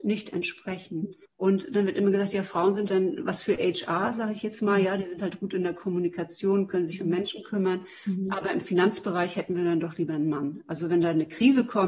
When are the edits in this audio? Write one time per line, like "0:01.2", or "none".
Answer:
0:02.9

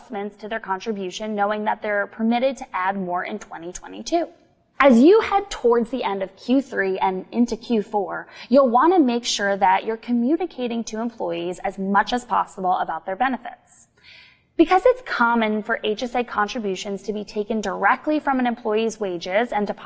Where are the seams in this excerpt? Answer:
0:04.7

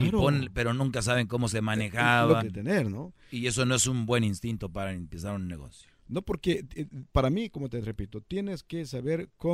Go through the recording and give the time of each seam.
0:02.4

